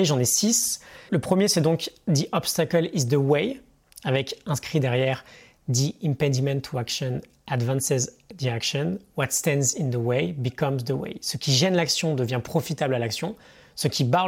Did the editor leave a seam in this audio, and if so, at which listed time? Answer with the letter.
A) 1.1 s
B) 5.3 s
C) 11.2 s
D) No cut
A